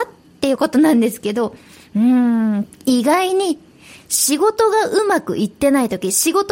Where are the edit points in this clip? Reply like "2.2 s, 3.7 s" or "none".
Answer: 2.7 s